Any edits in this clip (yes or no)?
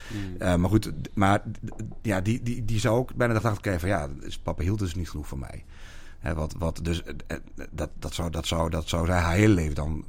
no